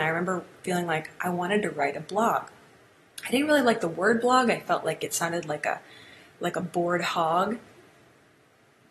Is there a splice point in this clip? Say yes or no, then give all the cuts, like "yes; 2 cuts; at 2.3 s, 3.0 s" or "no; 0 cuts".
no; 0 cuts